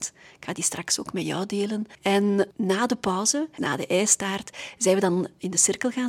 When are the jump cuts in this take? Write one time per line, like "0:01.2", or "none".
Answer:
0:03.6